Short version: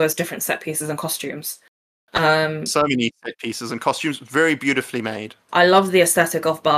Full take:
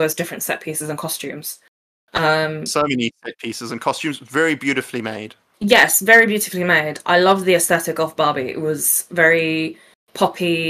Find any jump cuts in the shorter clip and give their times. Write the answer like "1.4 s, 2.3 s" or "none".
5.5 s